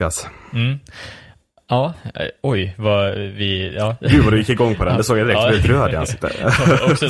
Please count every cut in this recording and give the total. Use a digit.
0